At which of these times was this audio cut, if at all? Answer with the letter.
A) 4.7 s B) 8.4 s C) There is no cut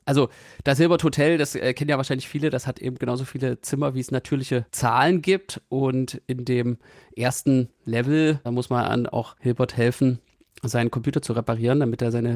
A